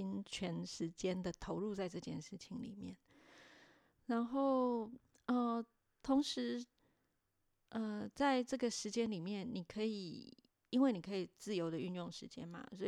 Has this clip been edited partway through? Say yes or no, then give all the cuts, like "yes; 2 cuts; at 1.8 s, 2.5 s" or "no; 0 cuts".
no; 0 cuts